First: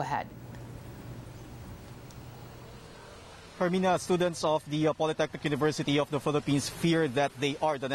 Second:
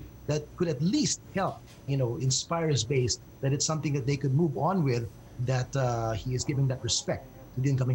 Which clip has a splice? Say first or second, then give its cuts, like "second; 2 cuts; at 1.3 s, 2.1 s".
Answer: second; 1 cut; at 1.9 s